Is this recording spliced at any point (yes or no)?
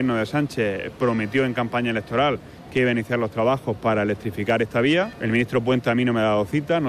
no